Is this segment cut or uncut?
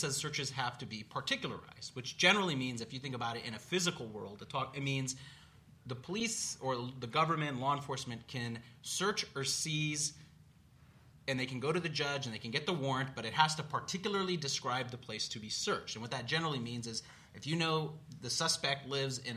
uncut